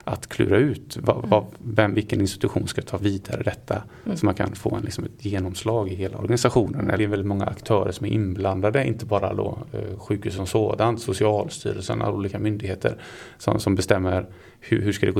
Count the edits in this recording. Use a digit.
1